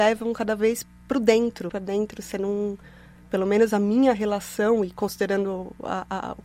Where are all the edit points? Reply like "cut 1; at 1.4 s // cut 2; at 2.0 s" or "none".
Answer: cut 1; at 1.7 s